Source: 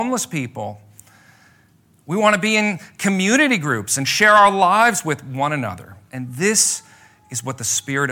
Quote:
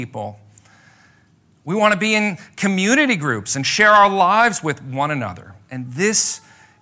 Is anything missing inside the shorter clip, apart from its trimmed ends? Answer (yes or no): no